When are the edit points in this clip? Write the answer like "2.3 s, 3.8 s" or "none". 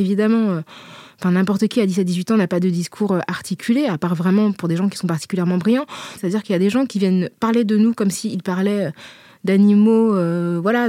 6.2 s

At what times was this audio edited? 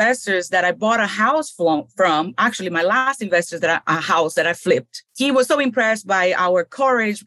3.8 s, 5.1 s

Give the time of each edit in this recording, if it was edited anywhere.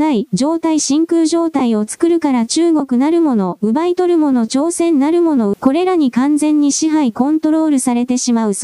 5.5 s

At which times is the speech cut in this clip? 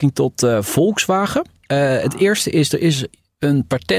none

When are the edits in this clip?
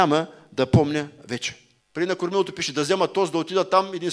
1.8 s

